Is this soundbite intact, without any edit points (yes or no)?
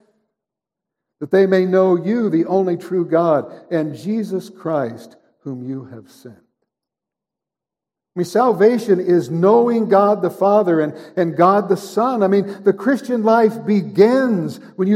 yes